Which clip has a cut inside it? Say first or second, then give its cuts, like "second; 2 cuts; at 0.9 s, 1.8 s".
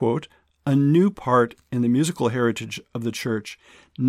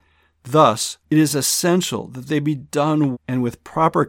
second; 2 cuts; at 1.0 s, 3.1 s